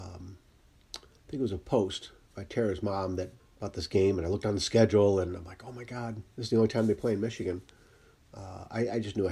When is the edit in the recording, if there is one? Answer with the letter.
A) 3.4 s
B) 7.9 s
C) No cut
A